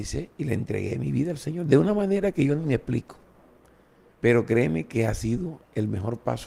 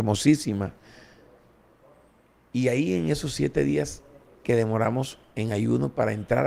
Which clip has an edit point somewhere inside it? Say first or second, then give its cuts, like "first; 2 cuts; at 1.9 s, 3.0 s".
first; 1 cut; at 4.1 s